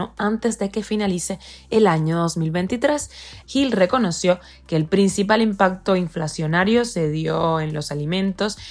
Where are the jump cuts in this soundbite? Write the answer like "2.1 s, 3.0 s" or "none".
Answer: 3.4 s